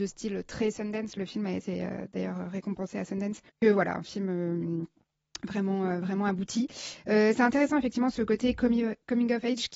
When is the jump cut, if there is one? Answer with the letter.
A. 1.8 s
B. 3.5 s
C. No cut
B